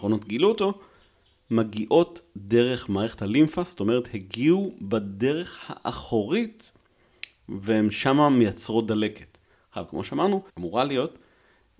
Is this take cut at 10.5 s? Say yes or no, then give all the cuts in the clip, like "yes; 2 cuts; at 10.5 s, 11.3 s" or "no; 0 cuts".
yes; 1 cut; at 10.5 s